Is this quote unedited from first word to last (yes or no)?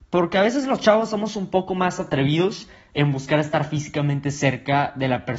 yes